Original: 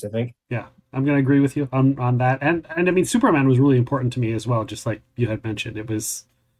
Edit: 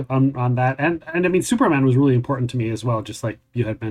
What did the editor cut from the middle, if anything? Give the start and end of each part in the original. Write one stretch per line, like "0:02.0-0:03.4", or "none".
none